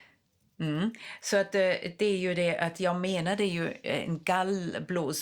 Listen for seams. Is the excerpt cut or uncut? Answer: uncut